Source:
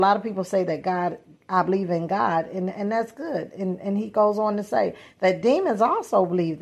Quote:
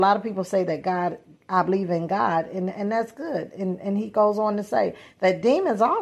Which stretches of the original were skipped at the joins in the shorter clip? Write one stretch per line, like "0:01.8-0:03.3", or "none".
none